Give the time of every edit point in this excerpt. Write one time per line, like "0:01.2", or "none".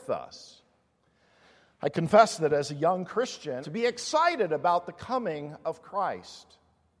0:03.6

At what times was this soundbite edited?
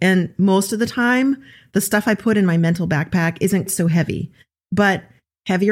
0:03.7

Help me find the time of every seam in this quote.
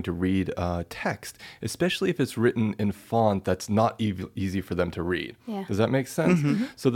none

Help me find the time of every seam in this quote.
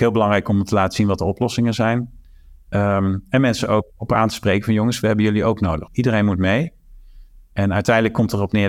0:05.9

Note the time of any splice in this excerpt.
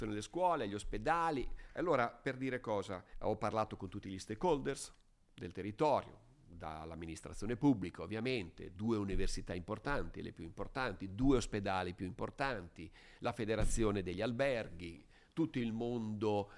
0:03.1

